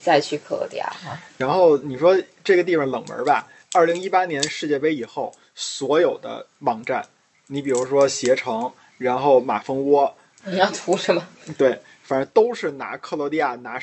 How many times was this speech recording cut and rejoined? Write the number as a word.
one